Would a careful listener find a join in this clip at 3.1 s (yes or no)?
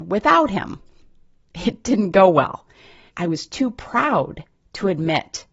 yes